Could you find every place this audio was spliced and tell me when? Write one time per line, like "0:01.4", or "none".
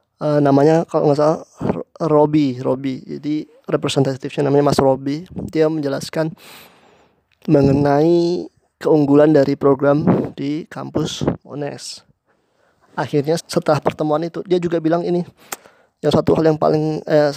0:13.4
0:16.1

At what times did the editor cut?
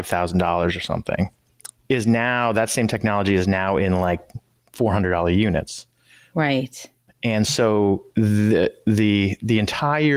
0:01.8

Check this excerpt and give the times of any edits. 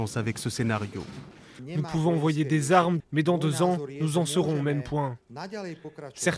0:01.6
0:03.0

